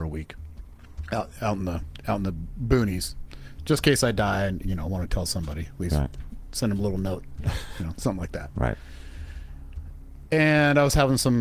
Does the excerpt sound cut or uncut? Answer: cut